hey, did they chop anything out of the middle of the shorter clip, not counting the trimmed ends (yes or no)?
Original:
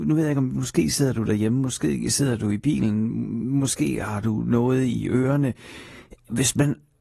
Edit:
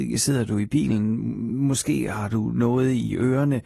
no